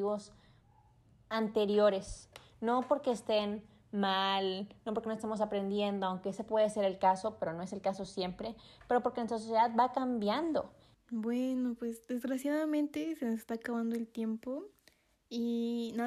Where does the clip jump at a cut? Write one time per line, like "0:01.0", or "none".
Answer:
0:10.9